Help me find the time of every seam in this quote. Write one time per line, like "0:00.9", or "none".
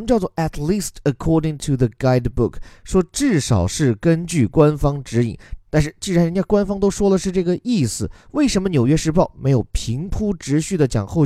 0:05.6